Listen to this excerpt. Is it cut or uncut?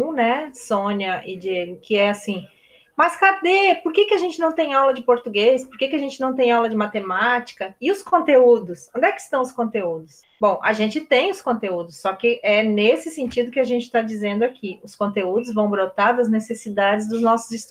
uncut